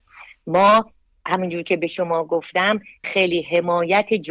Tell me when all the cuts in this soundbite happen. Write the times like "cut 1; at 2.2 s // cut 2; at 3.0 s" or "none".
cut 1; at 3.0 s

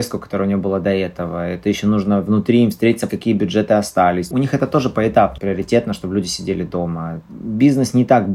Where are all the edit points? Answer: cut 1; at 3.1 s // cut 2; at 4.3 s // cut 3; at 5.4 s

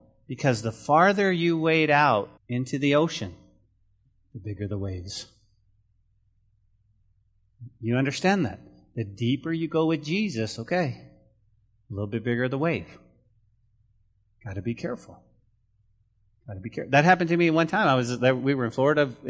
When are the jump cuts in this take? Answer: cut 1; at 2.4 s

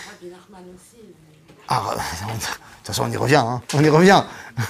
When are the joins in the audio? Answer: cut 1; at 3.6 s

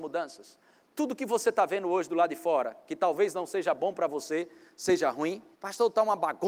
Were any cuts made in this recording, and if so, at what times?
cut 1; at 5.5 s

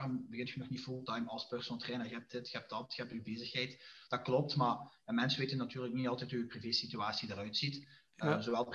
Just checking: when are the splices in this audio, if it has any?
none

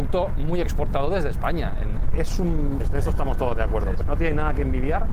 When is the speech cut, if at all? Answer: cut 1; at 2.8 s // cut 2; at 4.0 s

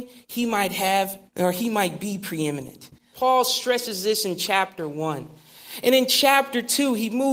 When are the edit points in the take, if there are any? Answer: cut 1; at 1.3 s // cut 2; at 3.1 s

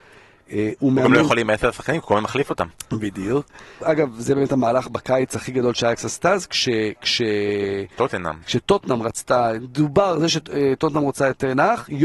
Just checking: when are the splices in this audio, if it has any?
cut 1; at 3.8 s

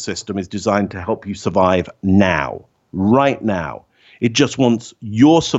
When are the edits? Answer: none

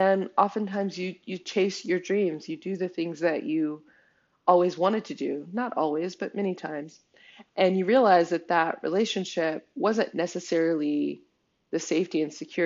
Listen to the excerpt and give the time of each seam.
none

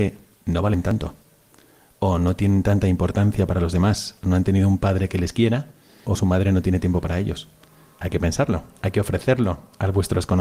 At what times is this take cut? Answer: cut 1; at 6.0 s // cut 2; at 7.9 s

